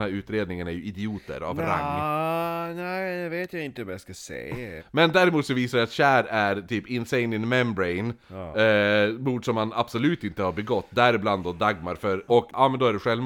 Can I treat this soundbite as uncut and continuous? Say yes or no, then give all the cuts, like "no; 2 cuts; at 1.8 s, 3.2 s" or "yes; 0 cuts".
no; 3 cuts; at 4.8 s, 8.5 s, 12.3 s